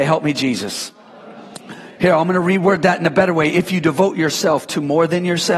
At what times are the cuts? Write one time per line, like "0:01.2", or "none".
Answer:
none